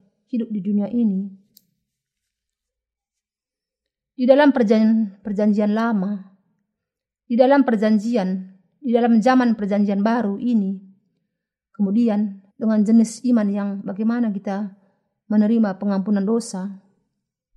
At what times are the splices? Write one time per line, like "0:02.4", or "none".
0:12.5